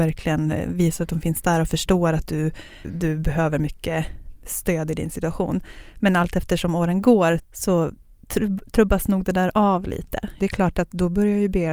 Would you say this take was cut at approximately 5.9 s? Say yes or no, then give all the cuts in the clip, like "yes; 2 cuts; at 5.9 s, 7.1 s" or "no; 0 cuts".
no; 3 cuts; at 2.8 s, 7.4 s, 10.4 s